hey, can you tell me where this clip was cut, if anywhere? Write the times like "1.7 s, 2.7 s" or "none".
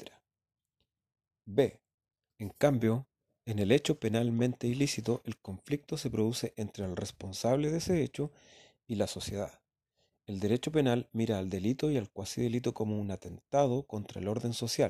2.3 s